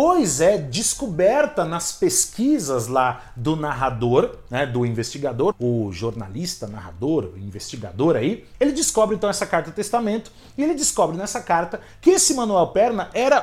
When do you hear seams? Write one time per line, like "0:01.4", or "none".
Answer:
0:05.5